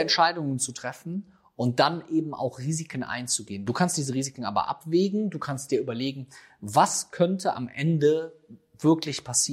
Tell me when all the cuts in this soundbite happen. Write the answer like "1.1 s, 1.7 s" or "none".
none